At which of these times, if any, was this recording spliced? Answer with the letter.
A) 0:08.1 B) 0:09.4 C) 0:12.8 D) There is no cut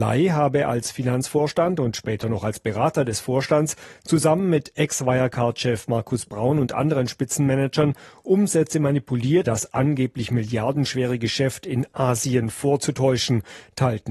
B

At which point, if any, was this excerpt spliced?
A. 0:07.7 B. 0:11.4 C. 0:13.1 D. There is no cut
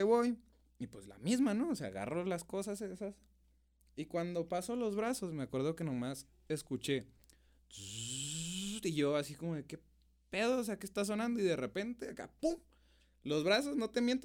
D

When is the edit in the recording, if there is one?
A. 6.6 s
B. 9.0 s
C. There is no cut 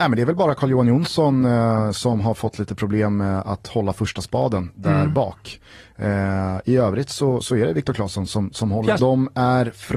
B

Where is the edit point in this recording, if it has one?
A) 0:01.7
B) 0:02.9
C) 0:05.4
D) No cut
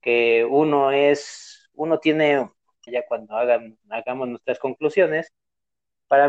B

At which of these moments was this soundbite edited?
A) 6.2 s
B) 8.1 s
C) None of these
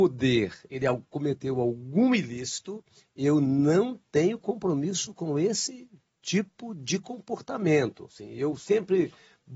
C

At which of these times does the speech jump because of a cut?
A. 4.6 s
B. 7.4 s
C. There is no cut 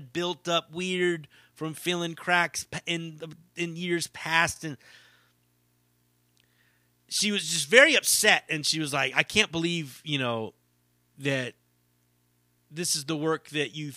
C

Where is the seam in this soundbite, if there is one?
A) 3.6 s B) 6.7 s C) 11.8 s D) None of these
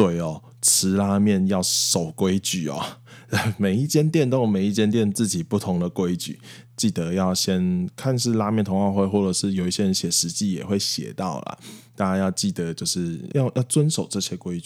B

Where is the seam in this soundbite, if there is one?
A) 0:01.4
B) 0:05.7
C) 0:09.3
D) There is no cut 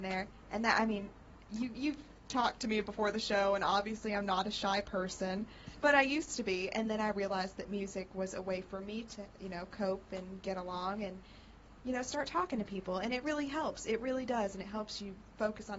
B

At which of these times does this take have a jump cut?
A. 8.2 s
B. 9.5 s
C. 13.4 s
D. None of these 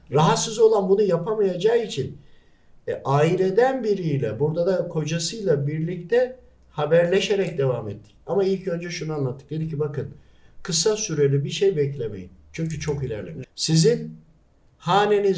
C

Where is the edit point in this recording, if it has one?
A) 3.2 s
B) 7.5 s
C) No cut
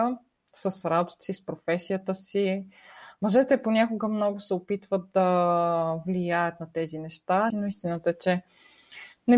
B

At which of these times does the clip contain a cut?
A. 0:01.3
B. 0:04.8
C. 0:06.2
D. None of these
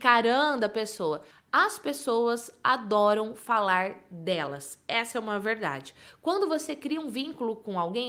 A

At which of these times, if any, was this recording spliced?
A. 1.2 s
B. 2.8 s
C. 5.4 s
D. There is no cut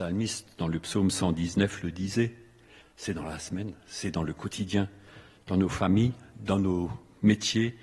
B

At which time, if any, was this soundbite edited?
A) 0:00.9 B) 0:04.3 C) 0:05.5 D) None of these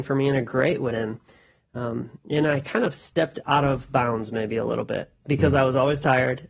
A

